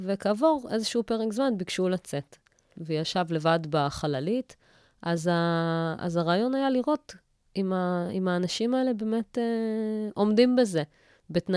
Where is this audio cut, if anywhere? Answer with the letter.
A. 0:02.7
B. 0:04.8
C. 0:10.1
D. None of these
A